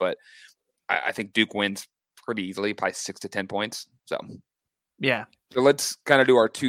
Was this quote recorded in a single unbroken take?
yes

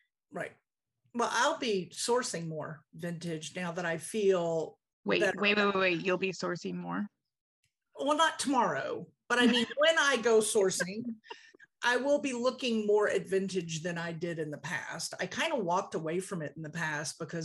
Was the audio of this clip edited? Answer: no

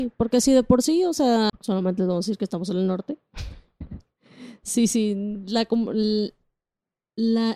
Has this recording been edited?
yes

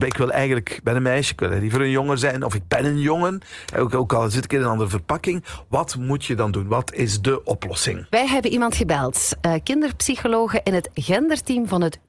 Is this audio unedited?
yes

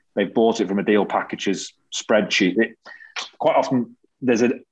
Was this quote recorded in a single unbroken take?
yes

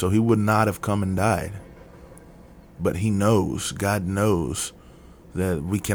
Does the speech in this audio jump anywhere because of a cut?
no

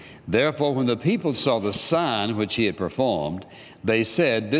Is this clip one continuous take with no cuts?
yes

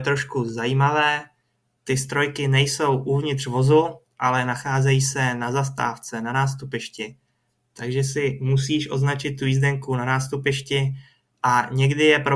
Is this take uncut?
yes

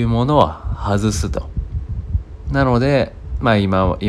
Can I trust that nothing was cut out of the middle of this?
no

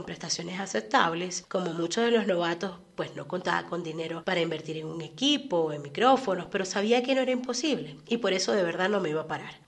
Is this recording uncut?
no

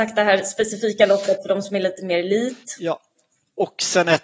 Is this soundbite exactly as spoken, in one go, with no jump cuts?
yes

